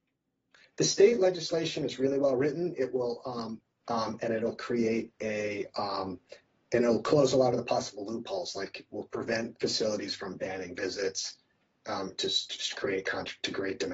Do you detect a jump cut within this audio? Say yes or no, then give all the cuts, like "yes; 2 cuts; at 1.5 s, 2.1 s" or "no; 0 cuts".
yes; 1 cut; at 3.8 s